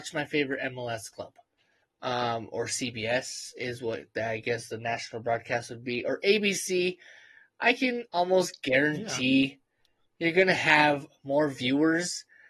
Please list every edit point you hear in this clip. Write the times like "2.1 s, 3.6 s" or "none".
1.8 s